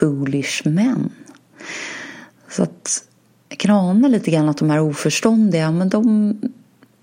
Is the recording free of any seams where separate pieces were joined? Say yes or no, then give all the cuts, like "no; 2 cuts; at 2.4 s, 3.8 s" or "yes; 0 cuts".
yes; 0 cuts